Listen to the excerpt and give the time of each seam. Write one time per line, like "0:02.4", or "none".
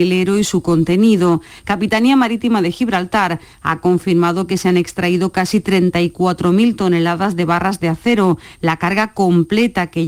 0:01.6